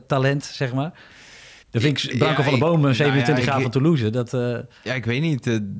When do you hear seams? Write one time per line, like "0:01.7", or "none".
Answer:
0:01.6